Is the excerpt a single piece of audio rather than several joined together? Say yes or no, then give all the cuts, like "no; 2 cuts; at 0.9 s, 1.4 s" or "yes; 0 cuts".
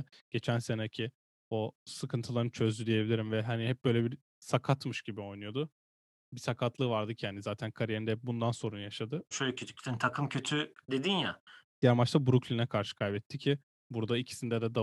no; 2 cuts; at 9.3 s, 11.7 s